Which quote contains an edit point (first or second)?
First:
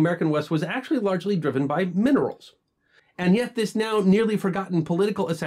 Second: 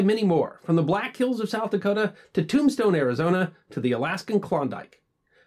first